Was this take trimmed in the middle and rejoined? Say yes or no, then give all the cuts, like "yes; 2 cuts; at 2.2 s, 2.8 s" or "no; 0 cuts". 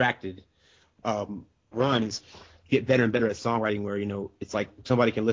yes; 1 cut; at 1.7 s